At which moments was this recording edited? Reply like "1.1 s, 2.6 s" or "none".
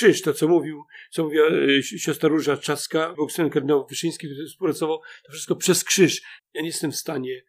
3.1 s, 6.4 s